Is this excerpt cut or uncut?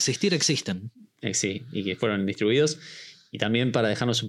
uncut